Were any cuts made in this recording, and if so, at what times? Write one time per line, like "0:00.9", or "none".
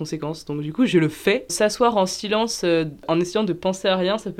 0:01.5

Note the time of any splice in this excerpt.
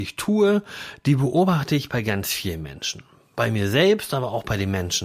none

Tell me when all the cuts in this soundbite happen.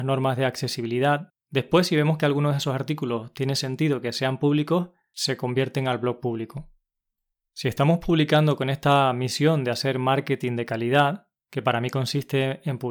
0:01.3

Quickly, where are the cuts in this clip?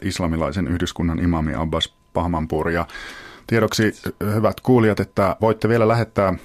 0:05.4

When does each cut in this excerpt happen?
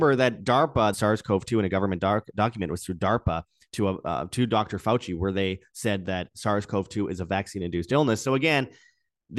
0:00.9

